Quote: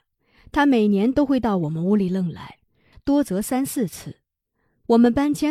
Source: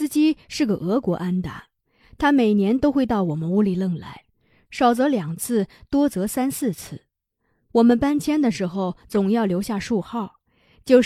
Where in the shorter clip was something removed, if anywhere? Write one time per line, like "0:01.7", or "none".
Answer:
0:02.9